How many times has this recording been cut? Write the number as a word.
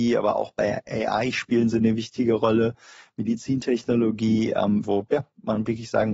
one